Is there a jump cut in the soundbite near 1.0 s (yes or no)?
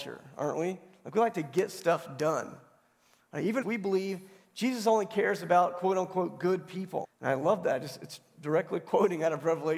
no